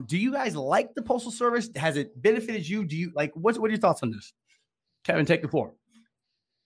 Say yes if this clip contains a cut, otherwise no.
no